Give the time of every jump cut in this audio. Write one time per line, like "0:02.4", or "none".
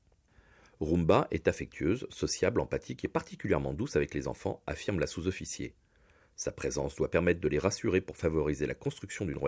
none